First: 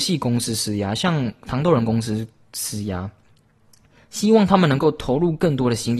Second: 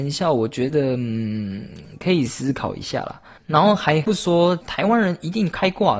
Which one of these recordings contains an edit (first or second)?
second